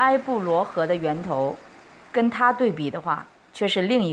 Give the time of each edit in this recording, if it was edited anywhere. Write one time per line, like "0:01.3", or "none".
none